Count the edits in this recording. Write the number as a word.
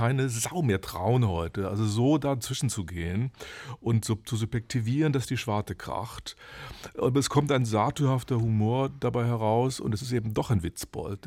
zero